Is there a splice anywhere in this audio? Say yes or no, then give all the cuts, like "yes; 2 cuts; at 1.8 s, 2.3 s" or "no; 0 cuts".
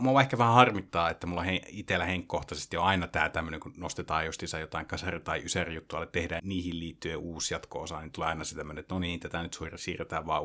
yes; 1 cut; at 6.4 s